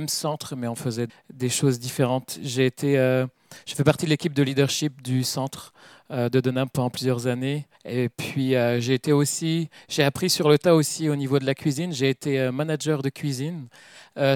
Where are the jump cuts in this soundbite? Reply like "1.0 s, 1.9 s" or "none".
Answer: 1.1 s, 7.7 s